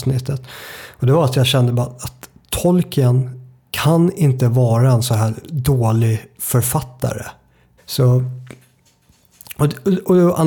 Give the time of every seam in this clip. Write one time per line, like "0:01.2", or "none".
0:07.8

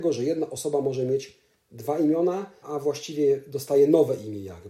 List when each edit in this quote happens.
0:02.6

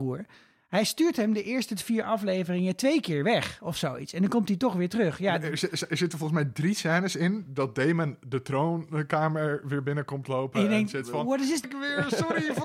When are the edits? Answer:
0:11.6

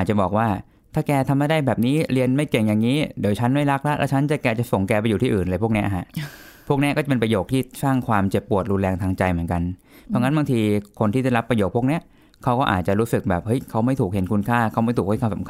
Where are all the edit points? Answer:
none

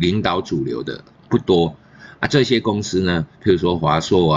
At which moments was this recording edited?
0:03.3

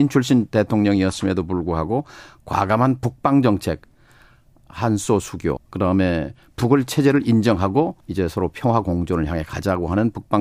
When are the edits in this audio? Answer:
0:05.6
0:08.0

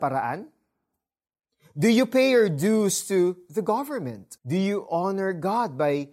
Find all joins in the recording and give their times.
0:04.4

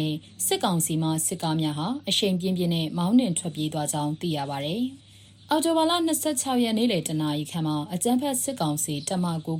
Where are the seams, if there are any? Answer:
0:05.0

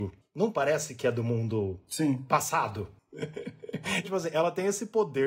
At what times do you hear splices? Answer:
0:04.0

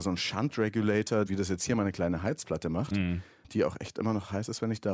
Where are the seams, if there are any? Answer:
0:01.3

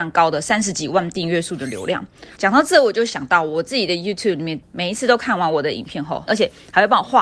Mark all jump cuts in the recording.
0:02.4
0:04.6
0:06.3

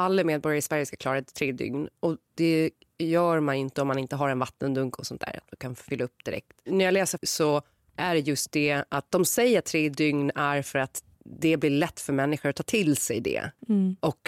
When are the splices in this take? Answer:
0:07.2
0:11.1

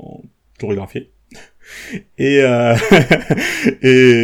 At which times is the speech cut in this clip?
none

